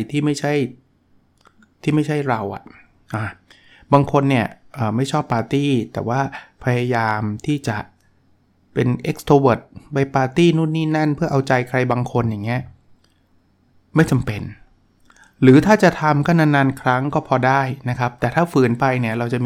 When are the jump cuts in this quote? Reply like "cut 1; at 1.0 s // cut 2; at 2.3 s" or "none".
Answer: none